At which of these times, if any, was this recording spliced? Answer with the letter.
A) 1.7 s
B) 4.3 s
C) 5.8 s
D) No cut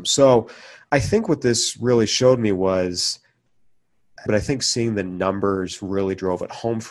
B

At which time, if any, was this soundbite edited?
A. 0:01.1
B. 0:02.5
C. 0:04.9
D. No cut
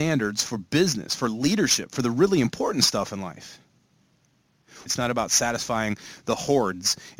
C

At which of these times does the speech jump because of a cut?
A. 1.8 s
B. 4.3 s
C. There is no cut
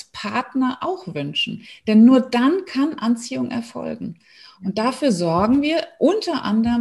C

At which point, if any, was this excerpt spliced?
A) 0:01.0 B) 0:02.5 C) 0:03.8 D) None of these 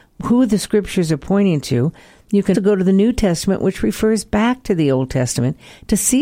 B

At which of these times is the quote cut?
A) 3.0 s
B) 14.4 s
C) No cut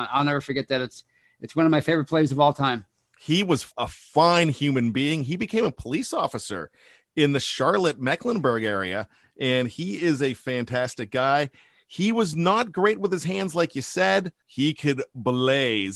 B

